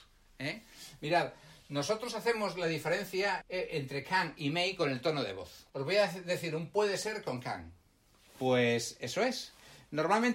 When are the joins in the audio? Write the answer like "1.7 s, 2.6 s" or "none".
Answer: 3.4 s, 5.7 s, 8.3 s

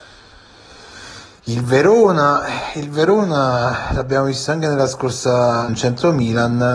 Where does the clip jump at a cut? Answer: 5.7 s

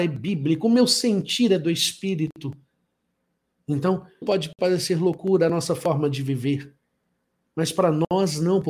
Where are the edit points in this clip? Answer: 4.2 s

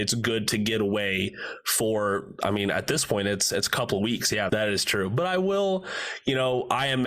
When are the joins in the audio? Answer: 4.5 s

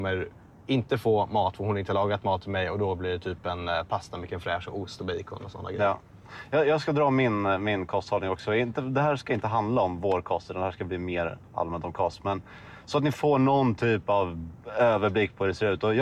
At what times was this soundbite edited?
none

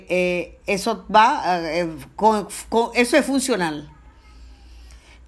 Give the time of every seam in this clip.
none

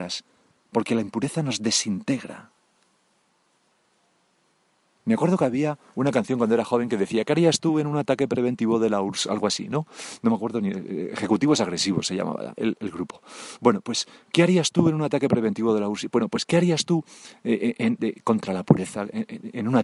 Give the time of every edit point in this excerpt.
4.9 s, 18.0 s

